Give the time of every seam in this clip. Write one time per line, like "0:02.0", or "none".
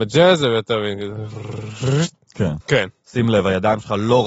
0:02.6